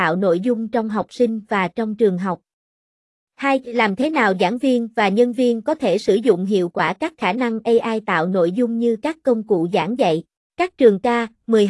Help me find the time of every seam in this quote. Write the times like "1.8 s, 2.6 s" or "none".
10.5 s